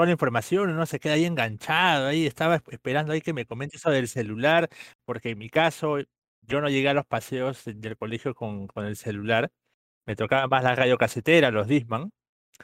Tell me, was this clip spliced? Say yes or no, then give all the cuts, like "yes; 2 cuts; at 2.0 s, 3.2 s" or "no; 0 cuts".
no; 0 cuts